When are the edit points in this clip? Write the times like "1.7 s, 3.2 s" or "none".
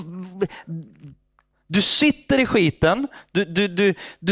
1.5 s